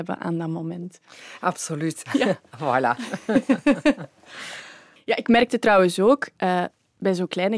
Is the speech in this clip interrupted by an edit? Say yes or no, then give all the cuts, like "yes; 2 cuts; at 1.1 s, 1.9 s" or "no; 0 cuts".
yes; 1 cut; at 2.1 s